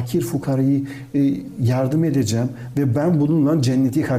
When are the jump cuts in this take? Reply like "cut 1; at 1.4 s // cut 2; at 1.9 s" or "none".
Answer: none